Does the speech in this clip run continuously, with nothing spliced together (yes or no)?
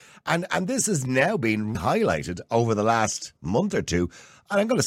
no